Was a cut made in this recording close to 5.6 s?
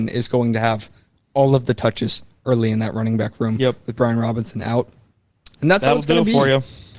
yes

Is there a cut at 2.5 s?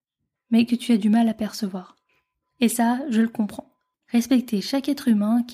no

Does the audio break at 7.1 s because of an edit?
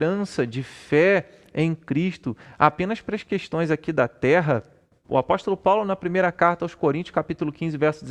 no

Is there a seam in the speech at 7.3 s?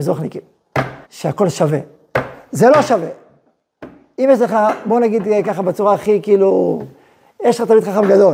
no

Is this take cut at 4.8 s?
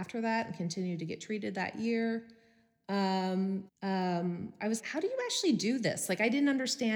yes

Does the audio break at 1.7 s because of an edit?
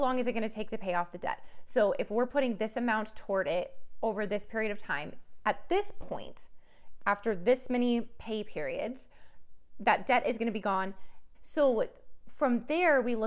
no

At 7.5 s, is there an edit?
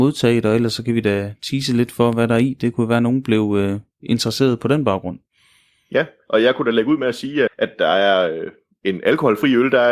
yes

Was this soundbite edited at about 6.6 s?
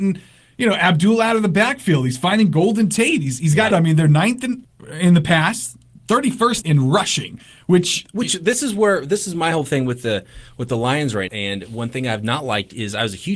yes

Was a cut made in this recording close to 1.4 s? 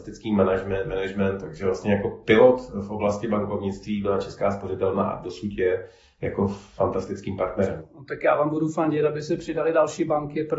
yes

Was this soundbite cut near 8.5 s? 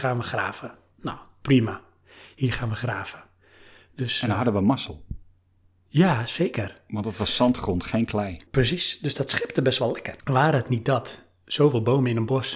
yes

